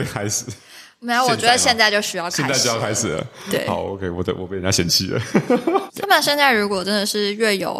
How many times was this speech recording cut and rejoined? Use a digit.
1